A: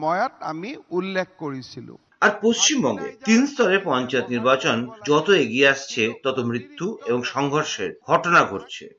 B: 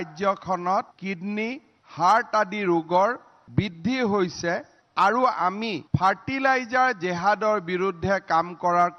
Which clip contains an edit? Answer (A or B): B